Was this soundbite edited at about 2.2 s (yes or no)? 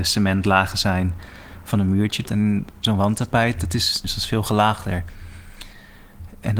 yes